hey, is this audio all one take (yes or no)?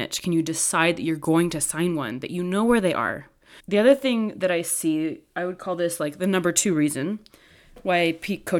no